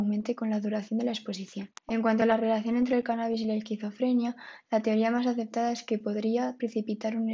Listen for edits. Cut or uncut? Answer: cut